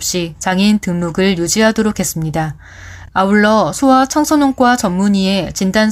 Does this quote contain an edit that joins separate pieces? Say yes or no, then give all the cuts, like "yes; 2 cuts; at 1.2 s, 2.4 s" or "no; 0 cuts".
no; 0 cuts